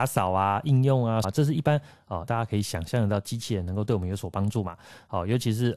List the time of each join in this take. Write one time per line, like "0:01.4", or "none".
0:01.2
0:02.3